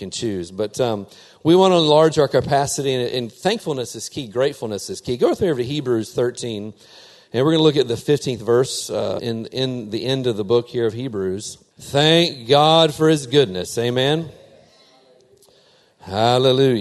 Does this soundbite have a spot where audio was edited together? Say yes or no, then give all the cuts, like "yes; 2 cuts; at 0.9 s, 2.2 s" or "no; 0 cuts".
yes; 2 cuts; at 9.2 s, 11.7 s